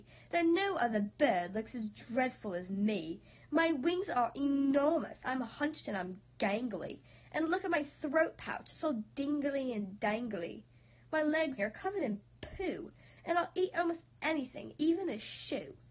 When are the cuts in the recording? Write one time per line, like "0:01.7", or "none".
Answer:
0:11.6